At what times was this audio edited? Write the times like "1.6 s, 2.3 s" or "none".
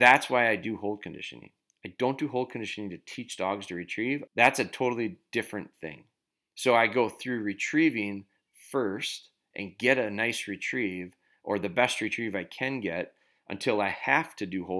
4.3 s